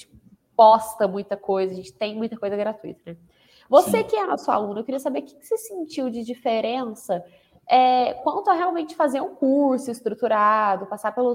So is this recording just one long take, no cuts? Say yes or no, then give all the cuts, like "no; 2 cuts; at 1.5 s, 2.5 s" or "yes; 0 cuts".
yes; 0 cuts